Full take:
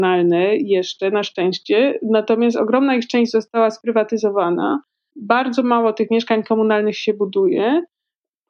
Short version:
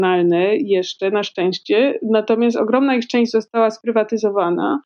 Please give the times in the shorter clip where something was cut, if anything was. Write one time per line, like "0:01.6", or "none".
none